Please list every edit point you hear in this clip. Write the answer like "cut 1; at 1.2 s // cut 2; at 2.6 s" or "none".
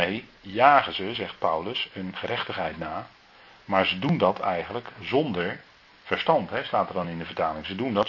none